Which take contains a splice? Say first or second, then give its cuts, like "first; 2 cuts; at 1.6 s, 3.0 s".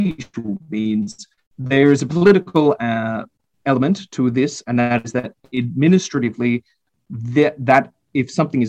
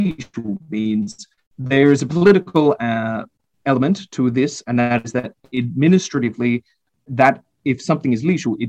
second; 1 cut; at 7.1 s